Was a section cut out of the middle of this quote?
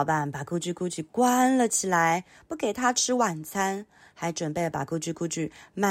no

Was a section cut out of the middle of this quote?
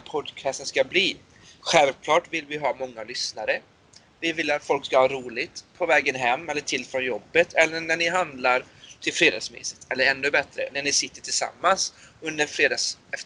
no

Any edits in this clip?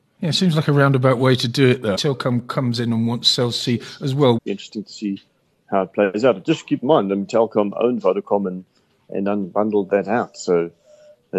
yes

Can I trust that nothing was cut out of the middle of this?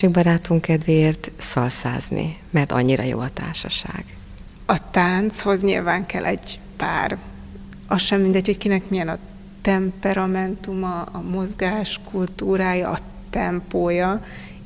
yes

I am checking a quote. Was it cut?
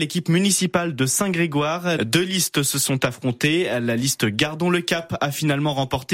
yes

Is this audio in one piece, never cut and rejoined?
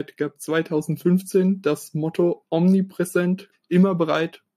no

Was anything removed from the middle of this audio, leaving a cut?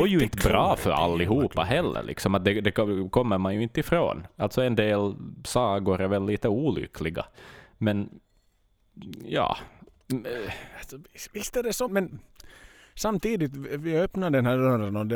yes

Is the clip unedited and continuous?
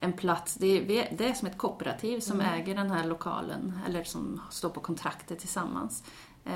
yes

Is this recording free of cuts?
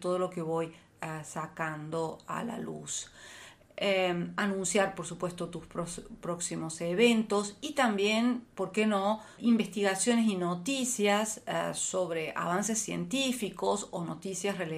no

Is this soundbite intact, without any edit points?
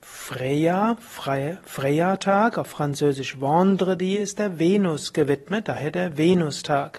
yes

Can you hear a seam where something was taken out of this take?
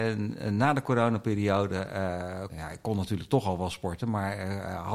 yes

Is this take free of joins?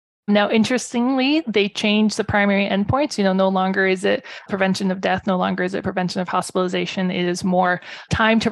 yes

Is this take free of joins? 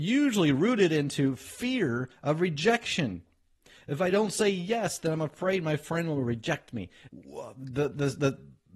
no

